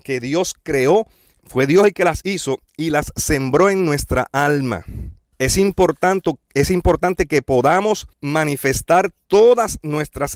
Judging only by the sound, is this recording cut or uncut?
cut